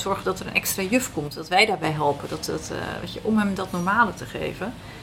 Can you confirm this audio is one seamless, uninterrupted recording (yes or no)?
yes